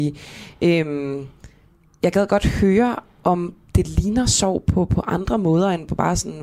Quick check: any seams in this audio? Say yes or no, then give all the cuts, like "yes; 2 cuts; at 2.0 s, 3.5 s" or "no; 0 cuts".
no; 0 cuts